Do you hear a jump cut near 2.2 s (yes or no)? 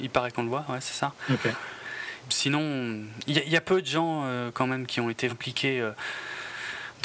yes